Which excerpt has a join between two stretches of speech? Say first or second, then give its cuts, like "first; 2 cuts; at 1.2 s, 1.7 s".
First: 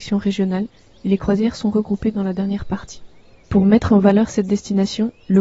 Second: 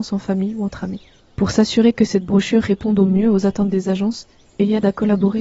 second; 1 cut; at 1.2 s